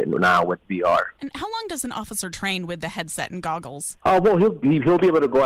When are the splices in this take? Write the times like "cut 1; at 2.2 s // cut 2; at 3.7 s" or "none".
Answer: none

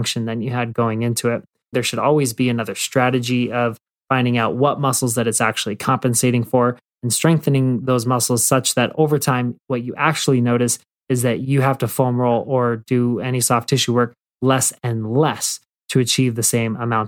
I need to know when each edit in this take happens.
cut 1; at 1.7 s

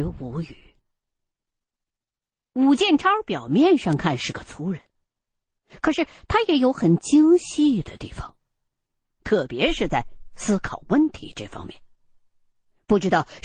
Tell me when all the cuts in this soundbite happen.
none

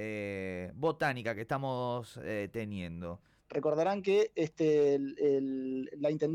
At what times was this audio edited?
cut 1; at 3.4 s

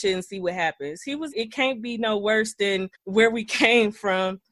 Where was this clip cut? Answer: cut 1; at 1.3 s // cut 2; at 2.9 s

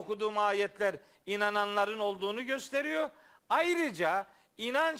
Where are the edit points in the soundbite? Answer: none

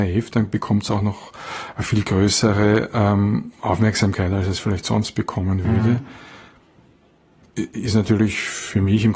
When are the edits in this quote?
none

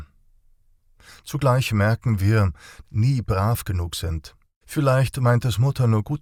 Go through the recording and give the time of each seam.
cut 1; at 2.8 s // cut 2; at 4.6 s

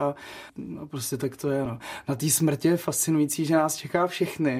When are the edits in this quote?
none

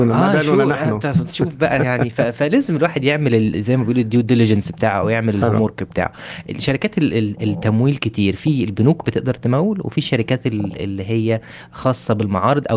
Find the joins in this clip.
none

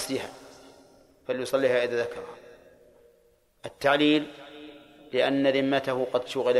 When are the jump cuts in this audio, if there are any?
none

